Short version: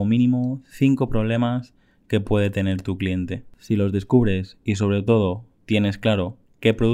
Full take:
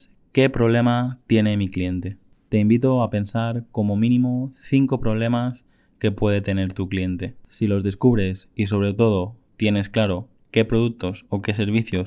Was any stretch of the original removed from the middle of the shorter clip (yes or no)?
no